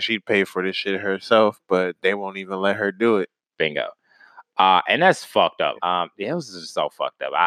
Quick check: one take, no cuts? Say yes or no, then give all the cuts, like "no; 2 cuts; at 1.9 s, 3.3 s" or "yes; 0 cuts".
no; 1 cut; at 5.8 s